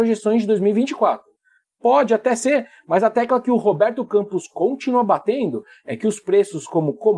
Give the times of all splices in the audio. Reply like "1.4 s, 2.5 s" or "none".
none